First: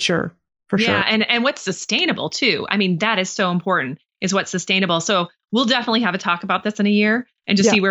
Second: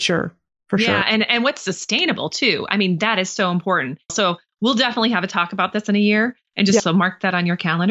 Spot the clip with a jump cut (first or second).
second